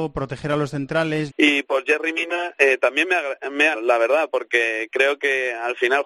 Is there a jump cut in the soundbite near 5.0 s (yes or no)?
no